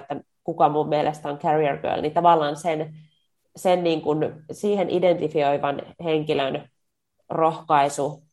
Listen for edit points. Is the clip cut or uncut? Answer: uncut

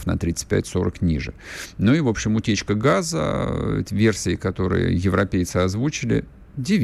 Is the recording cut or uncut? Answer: uncut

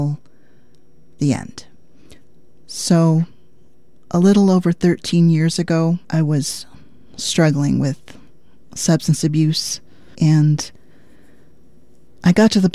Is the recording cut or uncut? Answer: cut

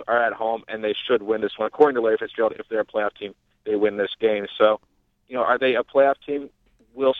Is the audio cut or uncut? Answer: uncut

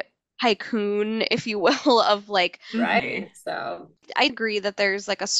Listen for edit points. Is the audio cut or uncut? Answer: cut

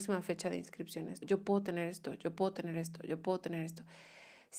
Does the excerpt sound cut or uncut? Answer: cut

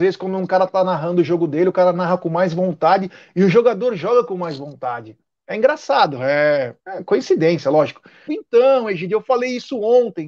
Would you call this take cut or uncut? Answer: cut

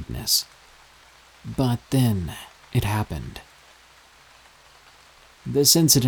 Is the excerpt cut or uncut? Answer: uncut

